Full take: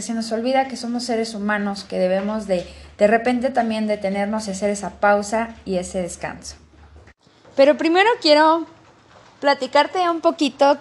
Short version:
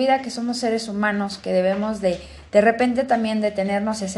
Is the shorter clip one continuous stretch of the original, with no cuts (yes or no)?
yes